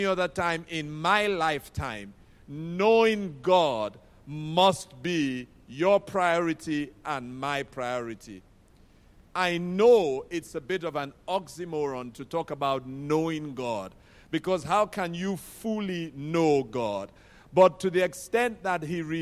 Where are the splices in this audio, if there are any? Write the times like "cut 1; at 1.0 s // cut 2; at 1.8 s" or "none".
cut 1; at 9.2 s